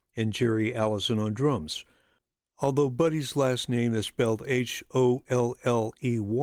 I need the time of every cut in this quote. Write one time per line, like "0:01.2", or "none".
none